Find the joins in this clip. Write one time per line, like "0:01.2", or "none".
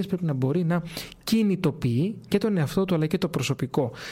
0:02.3